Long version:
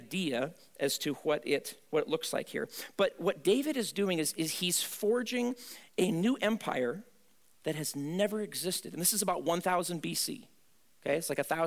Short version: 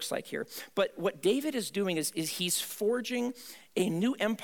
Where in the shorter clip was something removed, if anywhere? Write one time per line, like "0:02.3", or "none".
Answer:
none

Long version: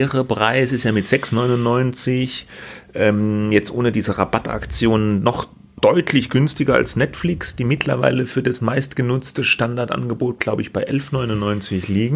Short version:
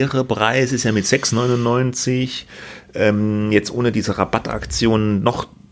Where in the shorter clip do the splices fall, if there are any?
none

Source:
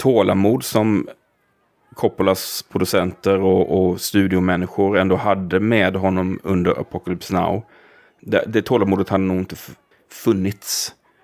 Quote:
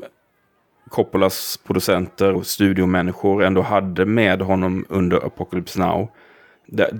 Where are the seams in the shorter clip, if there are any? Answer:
0:02.3

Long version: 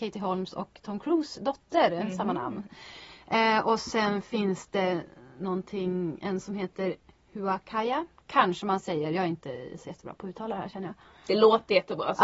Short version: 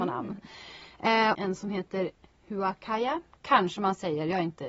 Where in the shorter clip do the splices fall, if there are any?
0:01.3

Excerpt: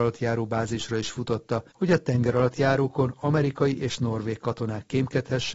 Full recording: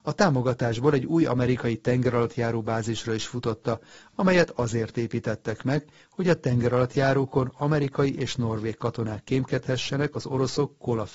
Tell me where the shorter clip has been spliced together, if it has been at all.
0:01.7

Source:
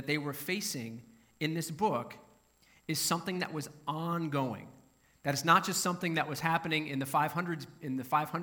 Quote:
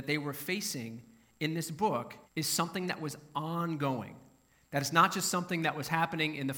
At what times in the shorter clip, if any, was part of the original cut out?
0:02.3

